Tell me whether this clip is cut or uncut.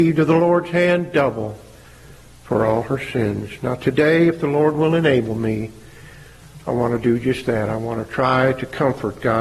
uncut